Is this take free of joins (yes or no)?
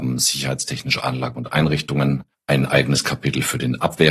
no